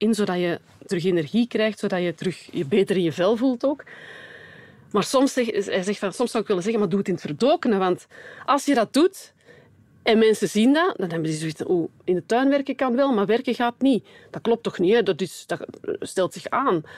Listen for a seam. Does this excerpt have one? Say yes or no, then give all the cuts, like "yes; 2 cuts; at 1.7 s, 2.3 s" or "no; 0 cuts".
no; 0 cuts